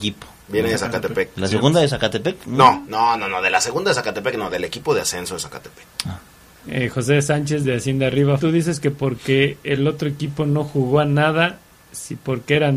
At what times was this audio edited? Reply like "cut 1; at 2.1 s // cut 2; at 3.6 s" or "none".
cut 1; at 5.9 s // cut 2; at 8.4 s

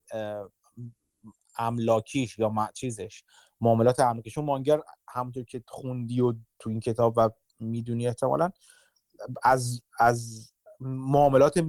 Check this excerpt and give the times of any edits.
none

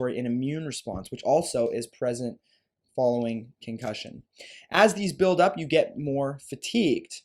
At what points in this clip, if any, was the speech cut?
none

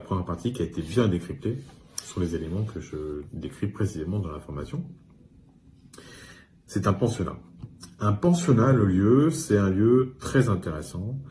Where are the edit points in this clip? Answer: none

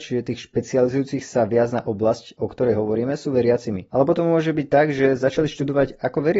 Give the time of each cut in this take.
cut 1; at 3.9 s

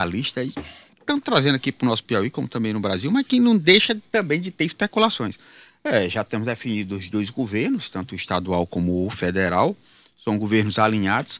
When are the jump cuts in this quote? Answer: none

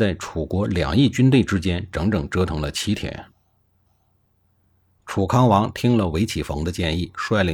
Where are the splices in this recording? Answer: cut 1; at 3.9 s

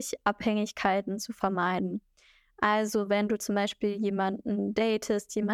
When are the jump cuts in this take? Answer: none

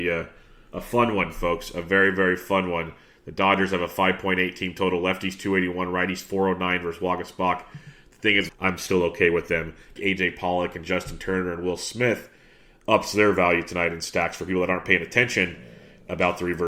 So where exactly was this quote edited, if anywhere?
cut 1; at 8.5 s // cut 2; at 10.0 s

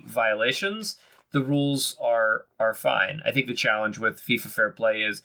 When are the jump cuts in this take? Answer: none

